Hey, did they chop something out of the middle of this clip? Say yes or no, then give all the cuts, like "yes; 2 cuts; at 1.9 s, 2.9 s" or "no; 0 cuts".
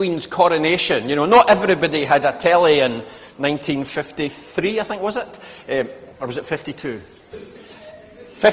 yes; 1 cut; at 7.3 s